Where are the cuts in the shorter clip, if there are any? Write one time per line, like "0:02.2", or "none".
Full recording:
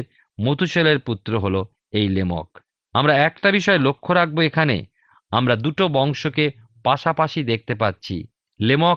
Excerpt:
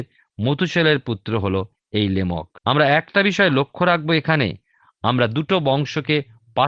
0:02.6